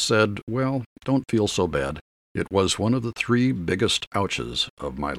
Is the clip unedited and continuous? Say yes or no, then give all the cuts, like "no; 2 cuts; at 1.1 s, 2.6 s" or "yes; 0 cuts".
no; 1 cut; at 2.2 s